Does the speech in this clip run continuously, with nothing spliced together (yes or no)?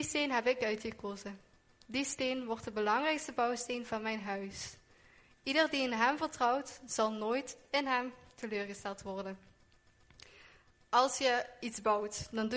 yes